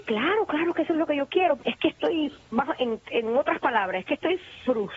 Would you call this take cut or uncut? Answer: cut